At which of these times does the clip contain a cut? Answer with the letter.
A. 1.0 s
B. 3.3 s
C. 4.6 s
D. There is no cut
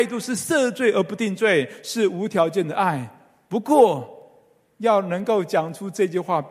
D